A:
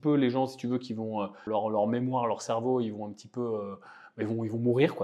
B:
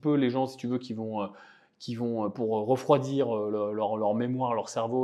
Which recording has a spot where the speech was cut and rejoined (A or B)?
A